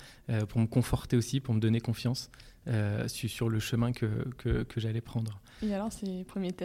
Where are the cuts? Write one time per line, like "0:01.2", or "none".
none